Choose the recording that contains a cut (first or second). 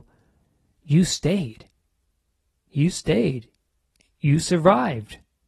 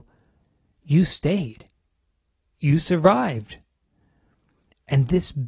second